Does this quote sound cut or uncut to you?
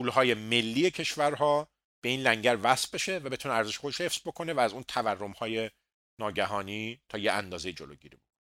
uncut